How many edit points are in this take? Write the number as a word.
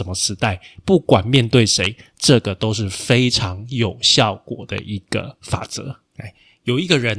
one